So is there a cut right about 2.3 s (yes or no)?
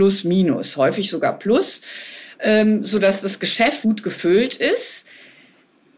no